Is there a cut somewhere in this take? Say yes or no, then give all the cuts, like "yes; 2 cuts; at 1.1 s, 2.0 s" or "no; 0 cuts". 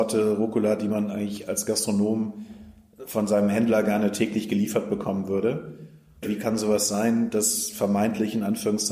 yes; 1 cut; at 6.2 s